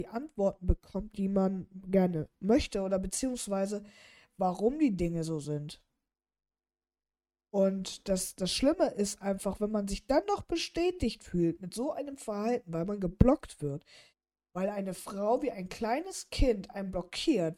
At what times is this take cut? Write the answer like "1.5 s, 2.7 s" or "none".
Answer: none